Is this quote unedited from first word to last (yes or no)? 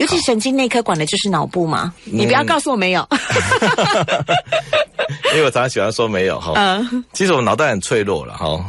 no